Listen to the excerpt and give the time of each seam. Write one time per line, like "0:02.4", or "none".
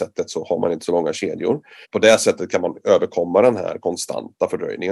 0:01.8